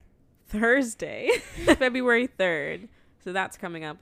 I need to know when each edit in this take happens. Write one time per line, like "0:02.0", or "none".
0:01.8